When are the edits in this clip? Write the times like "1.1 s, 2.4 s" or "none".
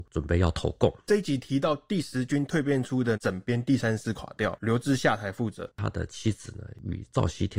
5.7 s